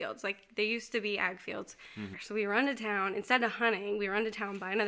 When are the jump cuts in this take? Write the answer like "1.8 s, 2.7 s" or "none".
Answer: 2.1 s